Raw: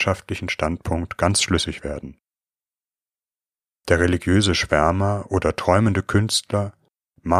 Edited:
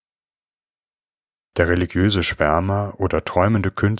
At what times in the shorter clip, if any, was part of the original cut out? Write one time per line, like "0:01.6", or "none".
none